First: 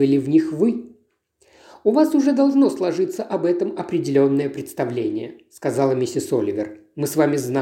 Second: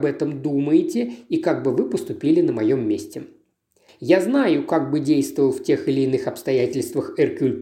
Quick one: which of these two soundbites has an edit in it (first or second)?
second